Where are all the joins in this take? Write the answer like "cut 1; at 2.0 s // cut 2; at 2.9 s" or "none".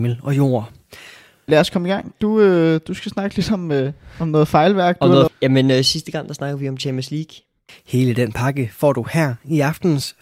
cut 1; at 1.5 s // cut 2; at 5.3 s // cut 3; at 7.7 s